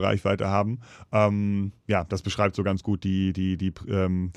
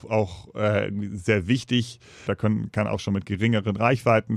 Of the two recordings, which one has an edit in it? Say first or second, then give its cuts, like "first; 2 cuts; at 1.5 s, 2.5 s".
second; 1 cut; at 2.3 s